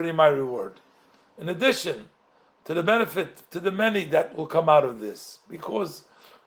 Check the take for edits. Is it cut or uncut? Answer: uncut